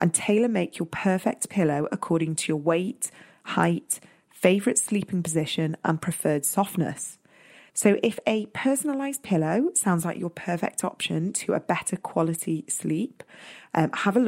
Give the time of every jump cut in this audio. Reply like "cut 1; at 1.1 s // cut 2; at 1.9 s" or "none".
cut 1; at 7.7 s